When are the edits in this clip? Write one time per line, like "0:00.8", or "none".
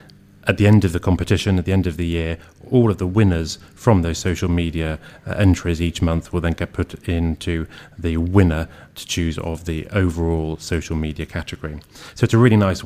none